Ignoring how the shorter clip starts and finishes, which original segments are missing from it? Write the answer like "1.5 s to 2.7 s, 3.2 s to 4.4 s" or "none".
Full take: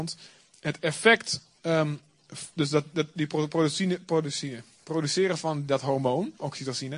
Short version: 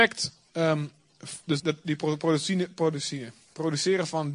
2.7 s to 2.9 s